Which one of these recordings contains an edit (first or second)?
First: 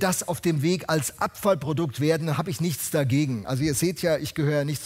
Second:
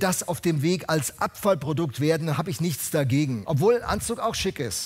second